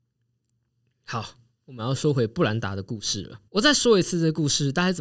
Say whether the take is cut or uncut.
cut